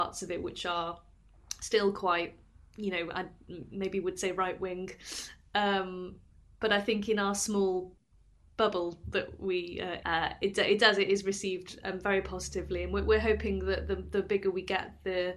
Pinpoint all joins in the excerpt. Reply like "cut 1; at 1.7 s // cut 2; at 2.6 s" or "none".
cut 1; at 10.0 s